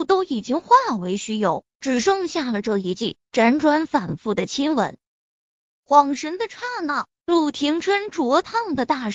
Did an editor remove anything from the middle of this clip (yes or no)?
yes